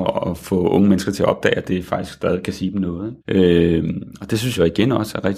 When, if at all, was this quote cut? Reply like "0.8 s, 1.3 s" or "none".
3.2 s